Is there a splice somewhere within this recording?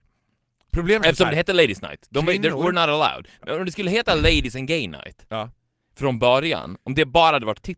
no; 0 cuts

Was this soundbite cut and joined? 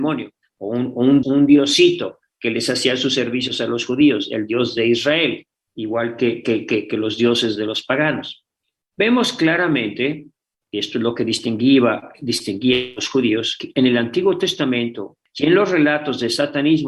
yes; 1 cut; at 1.2 s

